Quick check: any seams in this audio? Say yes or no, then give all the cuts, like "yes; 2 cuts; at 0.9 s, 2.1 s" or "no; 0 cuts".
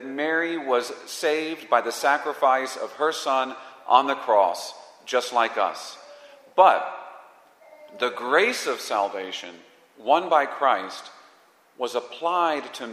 no; 0 cuts